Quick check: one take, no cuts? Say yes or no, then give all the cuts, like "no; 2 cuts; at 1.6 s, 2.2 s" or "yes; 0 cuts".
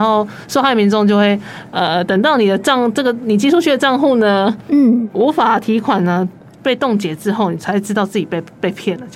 yes; 0 cuts